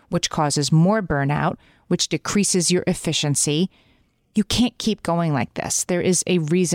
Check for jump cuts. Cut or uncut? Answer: uncut